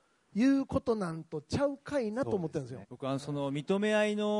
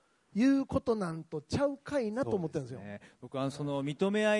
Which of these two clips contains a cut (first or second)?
first